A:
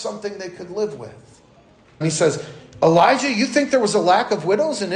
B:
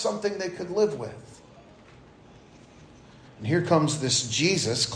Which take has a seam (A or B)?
A